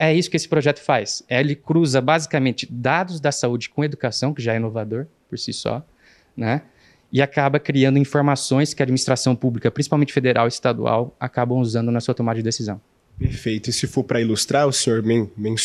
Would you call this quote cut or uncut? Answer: uncut